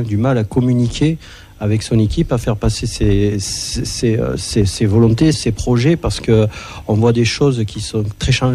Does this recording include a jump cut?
yes; 1 cut; at 5.3 s

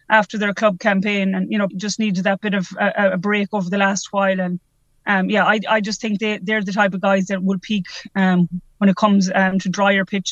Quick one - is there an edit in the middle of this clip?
yes; 1 cut; at 1.7 s

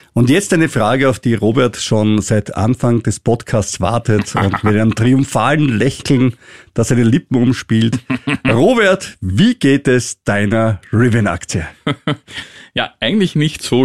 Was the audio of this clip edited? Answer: no; 0 cuts

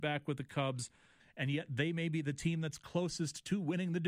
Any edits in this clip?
yes; 1 cut; at 1.2 s

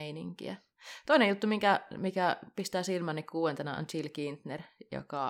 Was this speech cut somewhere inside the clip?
no; 0 cuts

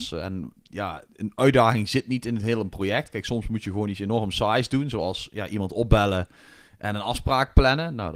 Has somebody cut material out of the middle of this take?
no; 0 cuts

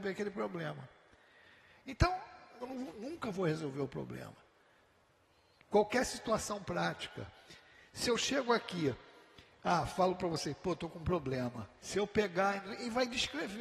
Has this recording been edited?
yes; 2 cuts; at 2.6 s, 11.8 s

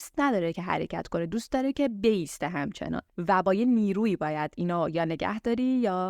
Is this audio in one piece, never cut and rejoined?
no; 1 cut; at 3.1 s

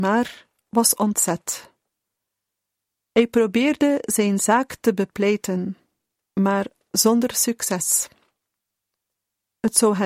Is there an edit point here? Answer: no; 0 cuts

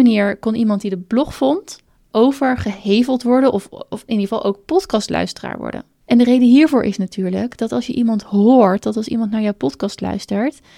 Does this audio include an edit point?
no; 0 cuts

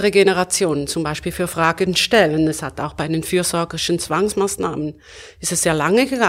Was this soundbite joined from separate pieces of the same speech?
no; 0 cuts

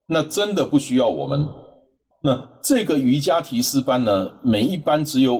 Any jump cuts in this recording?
yes; 1 cut; at 2.1 s

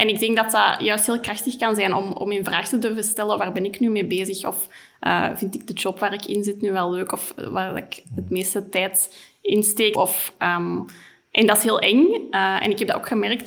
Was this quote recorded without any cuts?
no; 1 cut; at 9.9 s

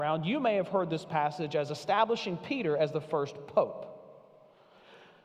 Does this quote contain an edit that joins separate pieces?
no; 0 cuts

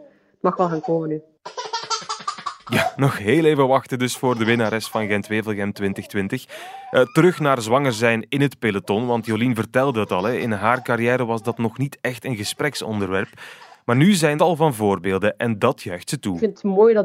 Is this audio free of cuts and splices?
no; 1 cut; at 14.4 s

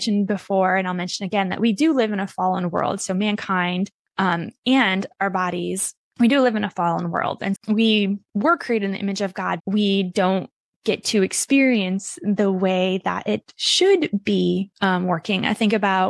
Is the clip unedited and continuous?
no; 2 cuts; at 7.5 s, 9.6 s

